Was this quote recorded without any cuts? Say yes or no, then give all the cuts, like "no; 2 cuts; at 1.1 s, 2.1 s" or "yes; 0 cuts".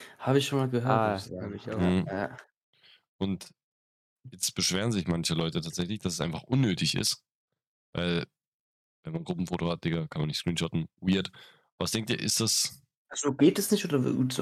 yes; 0 cuts